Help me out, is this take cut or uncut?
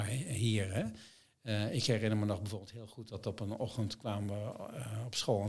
uncut